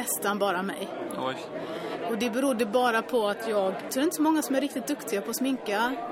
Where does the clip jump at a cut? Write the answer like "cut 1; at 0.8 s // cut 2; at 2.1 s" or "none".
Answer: cut 1; at 3.9 s